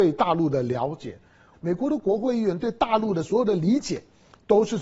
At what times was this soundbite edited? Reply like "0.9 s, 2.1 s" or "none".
1.5 s